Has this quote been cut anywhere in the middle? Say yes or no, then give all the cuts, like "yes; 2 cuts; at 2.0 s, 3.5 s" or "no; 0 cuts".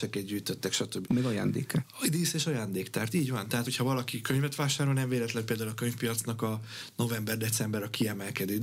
yes; 2 cuts; at 1.0 s, 3.6 s